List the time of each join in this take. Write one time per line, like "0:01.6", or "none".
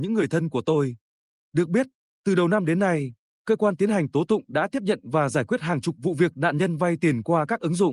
none